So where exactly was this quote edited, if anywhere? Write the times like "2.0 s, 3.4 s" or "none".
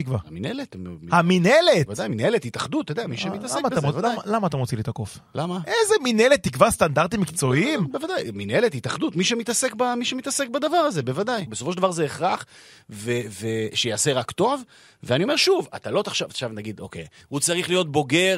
11.5 s, 17.2 s